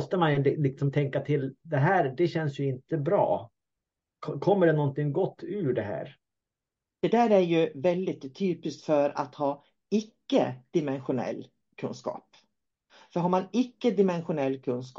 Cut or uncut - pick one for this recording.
uncut